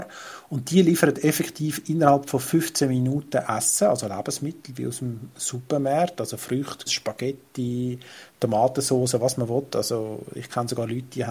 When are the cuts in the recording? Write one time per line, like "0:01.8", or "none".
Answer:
0:06.9